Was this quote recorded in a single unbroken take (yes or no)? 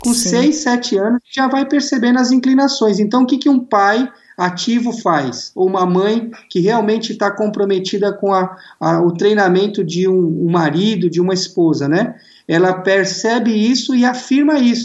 yes